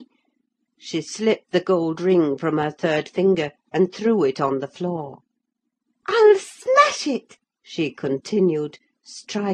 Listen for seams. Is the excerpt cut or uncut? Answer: uncut